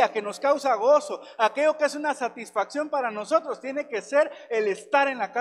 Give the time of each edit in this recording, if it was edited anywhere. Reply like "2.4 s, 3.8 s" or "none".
none